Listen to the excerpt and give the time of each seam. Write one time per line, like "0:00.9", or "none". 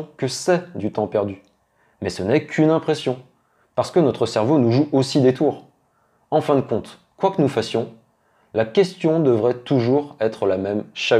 none